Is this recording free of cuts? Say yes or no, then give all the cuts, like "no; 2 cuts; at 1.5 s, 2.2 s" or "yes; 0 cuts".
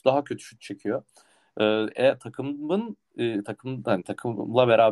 yes; 0 cuts